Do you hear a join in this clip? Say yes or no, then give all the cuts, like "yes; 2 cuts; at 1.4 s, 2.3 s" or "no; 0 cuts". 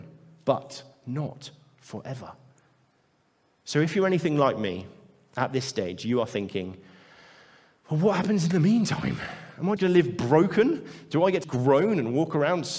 yes; 2 cuts; at 9.8 s, 11.4 s